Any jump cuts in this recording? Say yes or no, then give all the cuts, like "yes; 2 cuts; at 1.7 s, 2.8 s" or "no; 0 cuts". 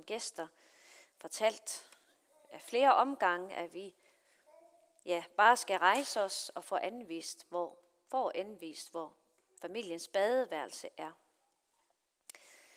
no; 0 cuts